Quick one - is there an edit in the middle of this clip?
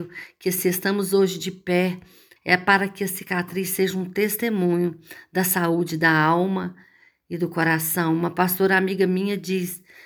yes; 1 cut; at 2.4 s

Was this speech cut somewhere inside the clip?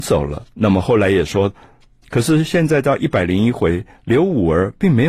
yes; 1 cut; at 2.0 s

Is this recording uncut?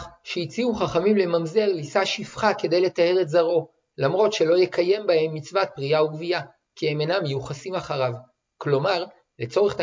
yes; 0 cuts

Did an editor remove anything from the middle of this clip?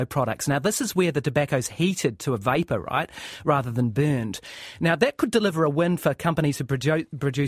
no; 0 cuts

